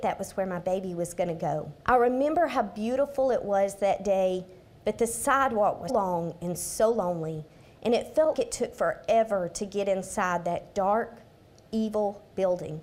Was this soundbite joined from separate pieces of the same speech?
yes; 3 cuts; at 1.8 s, 5.9 s, 8.3 s

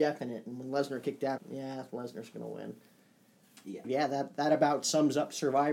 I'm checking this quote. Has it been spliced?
yes; 2 cuts; at 1.4 s, 3.8 s

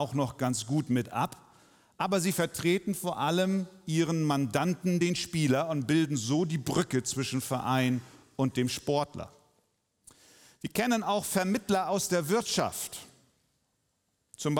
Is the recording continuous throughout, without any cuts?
yes; 0 cuts

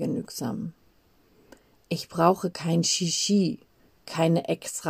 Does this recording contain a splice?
no; 0 cuts

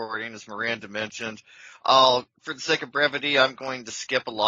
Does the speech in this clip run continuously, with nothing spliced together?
yes; 0 cuts

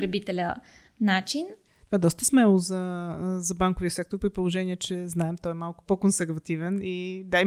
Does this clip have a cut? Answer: no; 0 cuts

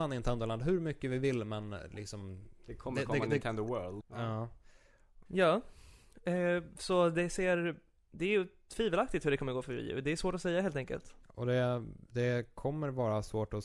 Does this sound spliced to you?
yes; 3 cuts; at 4.0 s, 5.3 s, 11.2 s

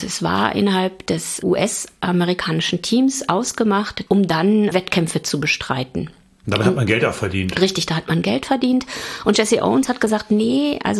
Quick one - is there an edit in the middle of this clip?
yes; 1 cut; at 4.1 s

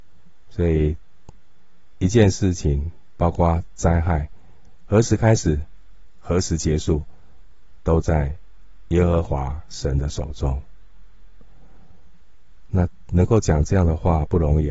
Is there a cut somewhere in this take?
yes; 1 cut; at 12.7 s

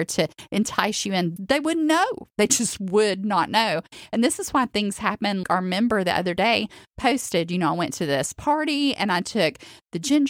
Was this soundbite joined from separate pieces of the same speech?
yes; 2 cuts; at 1.4 s, 5.4 s

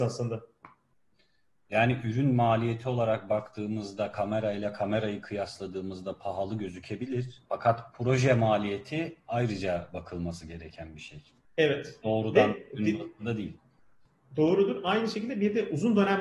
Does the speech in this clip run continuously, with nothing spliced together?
no; 1 cut; at 7.4 s

